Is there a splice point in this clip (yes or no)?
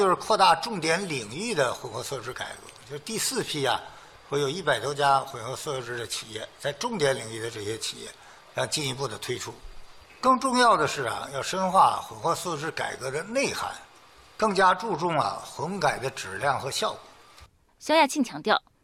no